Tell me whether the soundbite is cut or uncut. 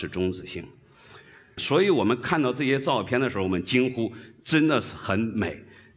cut